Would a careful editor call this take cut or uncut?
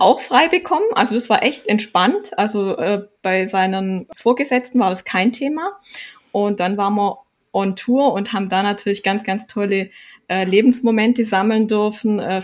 uncut